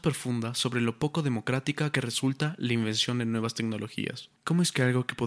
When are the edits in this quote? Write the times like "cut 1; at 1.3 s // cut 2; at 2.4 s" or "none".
cut 1; at 4.4 s